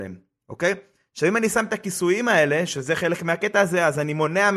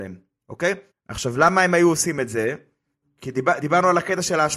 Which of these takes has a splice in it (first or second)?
second